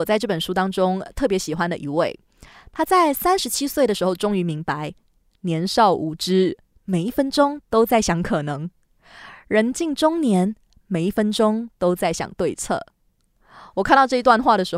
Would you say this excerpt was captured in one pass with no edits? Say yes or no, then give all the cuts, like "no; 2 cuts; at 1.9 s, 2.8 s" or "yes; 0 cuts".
yes; 0 cuts